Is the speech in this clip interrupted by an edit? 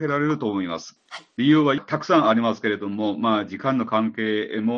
no; 0 cuts

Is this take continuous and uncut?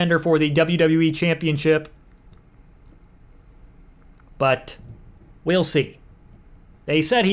no; 1 cut; at 4.3 s

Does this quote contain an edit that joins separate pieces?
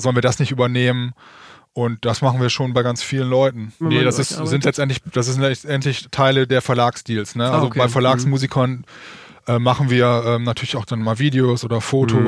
yes; 1 cut; at 3.8 s

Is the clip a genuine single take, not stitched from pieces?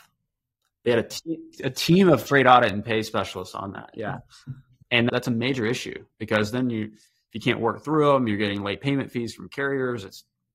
yes; 0 cuts

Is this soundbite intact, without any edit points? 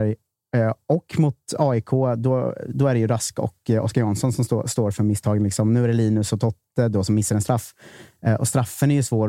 yes; 0 cuts

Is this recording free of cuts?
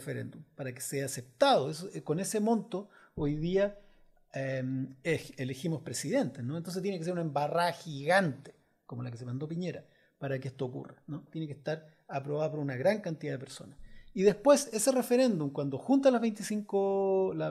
yes; 0 cuts

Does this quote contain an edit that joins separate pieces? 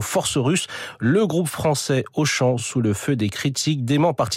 no; 0 cuts

